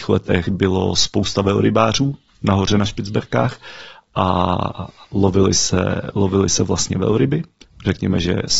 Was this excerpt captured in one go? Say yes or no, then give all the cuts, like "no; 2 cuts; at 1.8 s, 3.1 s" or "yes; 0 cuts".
yes; 0 cuts